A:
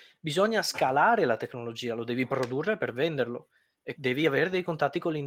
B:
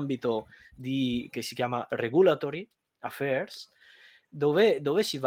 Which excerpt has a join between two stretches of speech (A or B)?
A